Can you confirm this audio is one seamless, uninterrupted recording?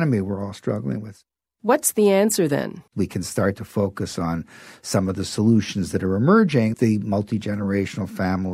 no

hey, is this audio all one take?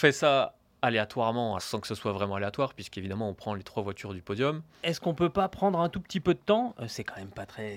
no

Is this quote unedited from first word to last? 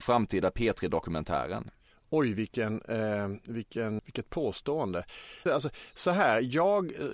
no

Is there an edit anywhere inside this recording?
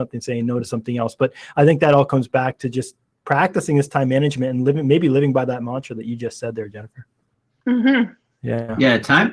no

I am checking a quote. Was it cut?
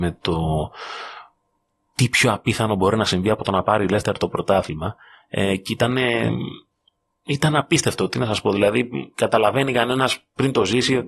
no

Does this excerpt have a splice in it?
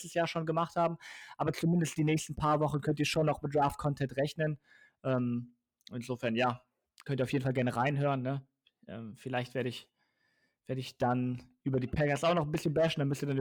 no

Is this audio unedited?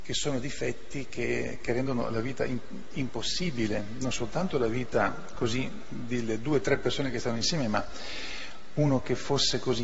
yes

